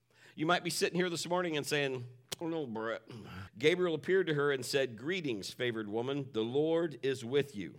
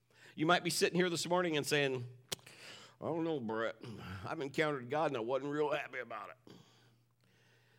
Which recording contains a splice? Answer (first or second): first